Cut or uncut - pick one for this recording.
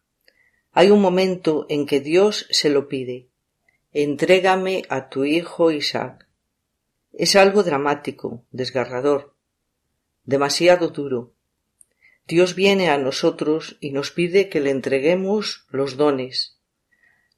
uncut